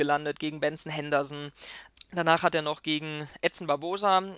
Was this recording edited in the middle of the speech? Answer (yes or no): yes